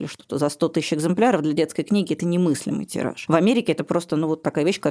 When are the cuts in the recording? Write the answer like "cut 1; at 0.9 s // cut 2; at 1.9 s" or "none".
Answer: none